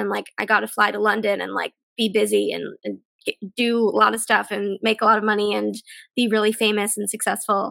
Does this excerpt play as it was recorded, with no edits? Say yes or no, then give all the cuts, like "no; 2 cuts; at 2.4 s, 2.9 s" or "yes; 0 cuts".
yes; 0 cuts